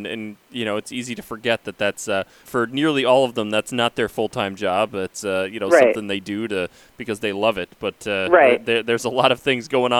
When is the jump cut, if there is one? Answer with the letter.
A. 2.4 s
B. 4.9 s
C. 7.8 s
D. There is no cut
A